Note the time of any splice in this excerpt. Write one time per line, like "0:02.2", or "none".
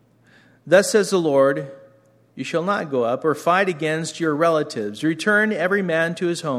none